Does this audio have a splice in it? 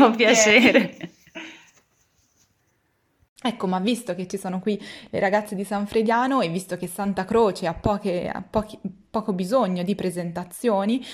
yes; 1 cut; at 3.4 s

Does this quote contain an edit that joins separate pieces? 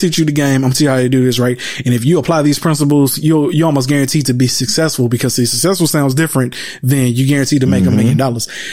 no; 0 cuts

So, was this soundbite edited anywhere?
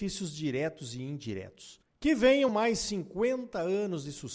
yes; 1 cut; at 2.5 s

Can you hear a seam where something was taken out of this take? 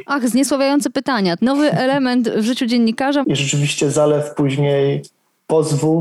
yes; 2 cuts; at 1.4 s, 3.2 s

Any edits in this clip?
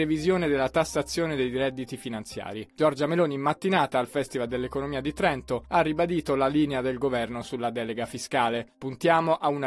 no; 0 cuts

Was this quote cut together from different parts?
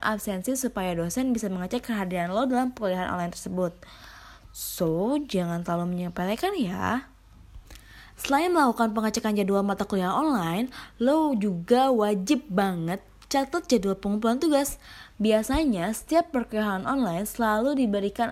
yes; 2 cuts; at 8.1 s, 15.1 s

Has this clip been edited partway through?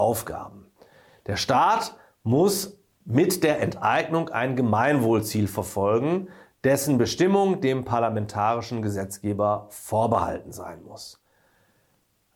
no; 0 cuts

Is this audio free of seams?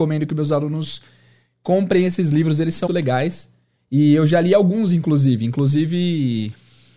no; 1 cut; at 2.9 s

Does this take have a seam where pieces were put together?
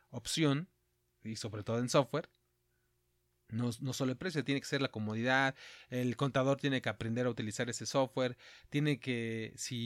no; 0 cuts

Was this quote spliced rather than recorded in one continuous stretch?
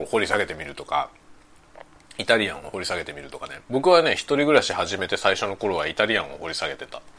yes; 1 cut; at 3.6 s

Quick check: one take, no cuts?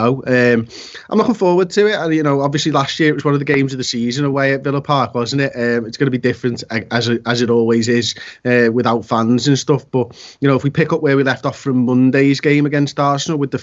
yes; 0 cuts

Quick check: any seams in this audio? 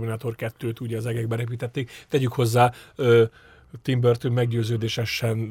no; 0 cuts

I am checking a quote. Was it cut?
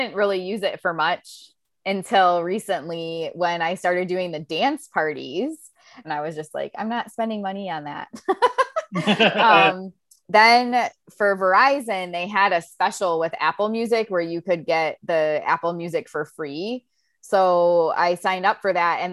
yes; 1 cut; at 6.0 s

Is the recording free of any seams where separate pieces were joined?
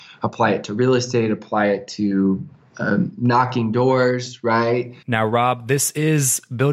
no; 1 cut; at 5.0 s

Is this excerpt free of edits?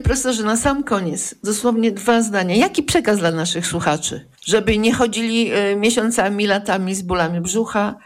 no; 1 cut; at 4.3 s

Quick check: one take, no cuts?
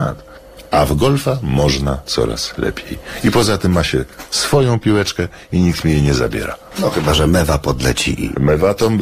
yes; 0 cuts

